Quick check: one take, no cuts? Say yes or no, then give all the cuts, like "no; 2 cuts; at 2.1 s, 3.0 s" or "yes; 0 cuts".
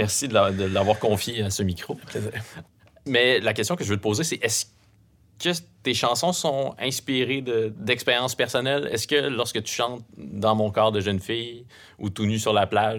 yes; 0 cuts